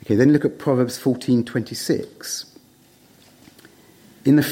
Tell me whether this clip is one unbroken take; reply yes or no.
yes